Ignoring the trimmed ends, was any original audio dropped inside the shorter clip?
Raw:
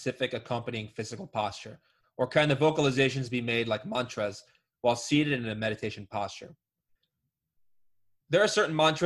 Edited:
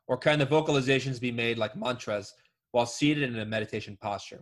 no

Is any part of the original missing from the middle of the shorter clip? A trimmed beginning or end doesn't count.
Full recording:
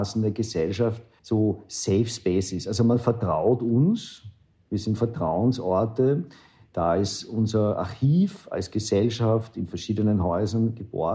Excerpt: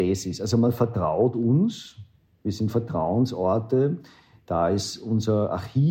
no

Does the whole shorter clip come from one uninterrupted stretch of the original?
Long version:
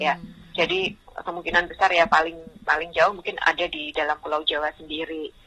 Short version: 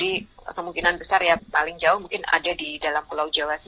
no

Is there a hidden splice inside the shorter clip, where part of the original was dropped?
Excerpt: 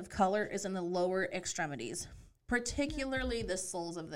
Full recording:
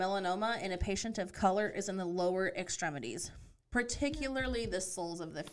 no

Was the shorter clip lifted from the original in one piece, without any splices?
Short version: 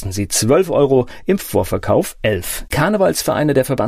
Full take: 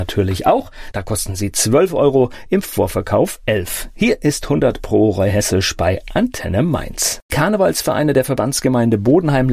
no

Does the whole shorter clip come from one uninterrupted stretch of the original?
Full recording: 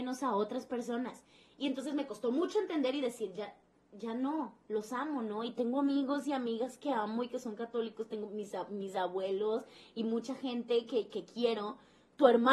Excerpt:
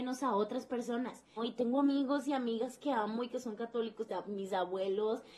no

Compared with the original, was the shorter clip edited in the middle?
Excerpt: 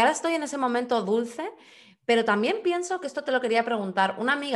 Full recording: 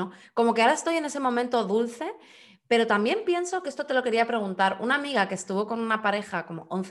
no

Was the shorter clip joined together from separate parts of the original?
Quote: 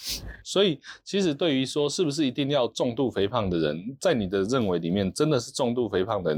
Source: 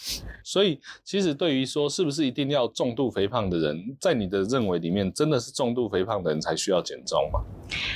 no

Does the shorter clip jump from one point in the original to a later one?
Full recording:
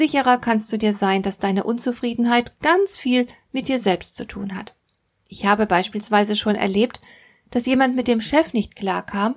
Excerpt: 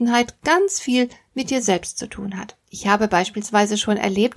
yes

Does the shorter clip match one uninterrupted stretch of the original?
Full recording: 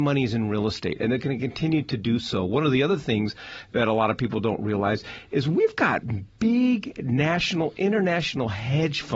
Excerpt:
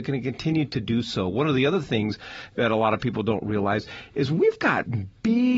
yes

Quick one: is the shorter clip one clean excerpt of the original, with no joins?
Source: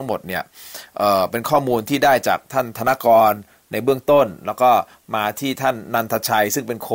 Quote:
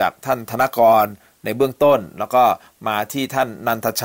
yes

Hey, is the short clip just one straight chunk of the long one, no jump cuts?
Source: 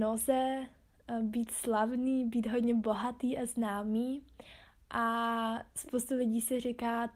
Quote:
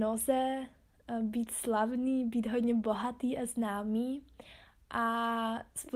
yes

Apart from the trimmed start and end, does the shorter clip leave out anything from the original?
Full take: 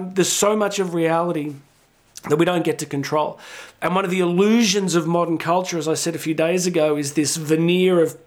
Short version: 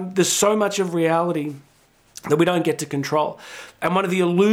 no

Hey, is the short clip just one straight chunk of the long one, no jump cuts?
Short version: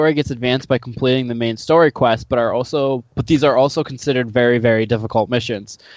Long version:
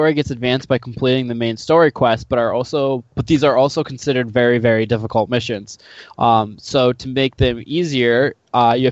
yes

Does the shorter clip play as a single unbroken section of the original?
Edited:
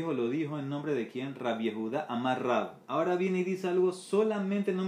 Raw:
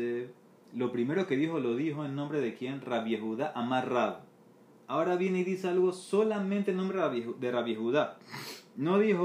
no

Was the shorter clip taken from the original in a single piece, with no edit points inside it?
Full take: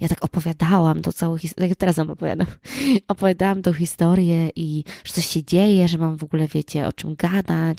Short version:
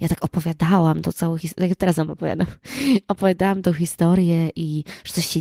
yes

